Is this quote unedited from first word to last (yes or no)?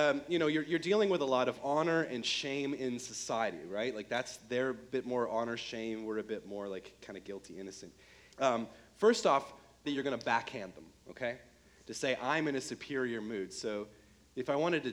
no